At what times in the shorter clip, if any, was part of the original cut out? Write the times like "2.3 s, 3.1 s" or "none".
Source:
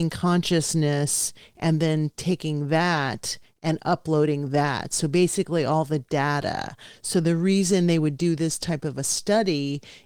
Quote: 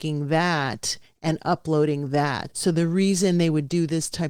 2.5 s